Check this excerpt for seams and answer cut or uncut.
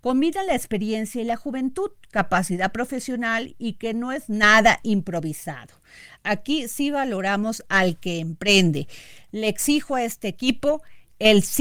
cut